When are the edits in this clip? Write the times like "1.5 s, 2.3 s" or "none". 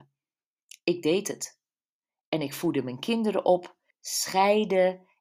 3.9 s